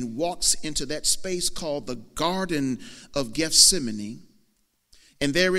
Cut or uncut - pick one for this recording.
uncut